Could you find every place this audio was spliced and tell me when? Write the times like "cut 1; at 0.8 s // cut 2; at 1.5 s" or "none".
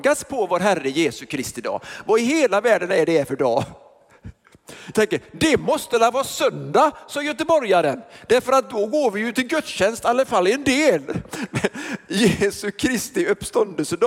cut 1; at 4.9 s